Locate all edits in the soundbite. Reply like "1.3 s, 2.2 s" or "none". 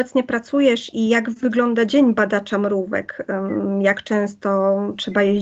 0.9 s